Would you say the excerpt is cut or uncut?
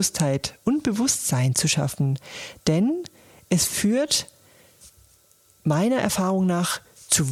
uncut